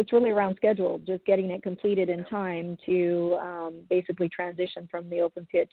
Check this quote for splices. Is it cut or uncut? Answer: uncut